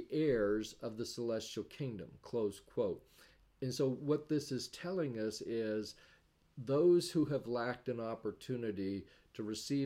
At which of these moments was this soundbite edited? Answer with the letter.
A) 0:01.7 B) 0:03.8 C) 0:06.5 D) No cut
D